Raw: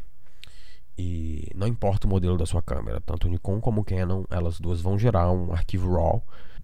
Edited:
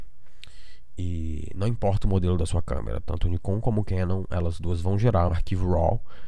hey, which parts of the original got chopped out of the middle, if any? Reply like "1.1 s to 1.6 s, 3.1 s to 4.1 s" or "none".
5.3 s to 5.5 s